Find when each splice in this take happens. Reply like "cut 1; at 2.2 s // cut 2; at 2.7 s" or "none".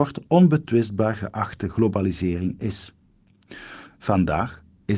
cut 1; at 3.9 s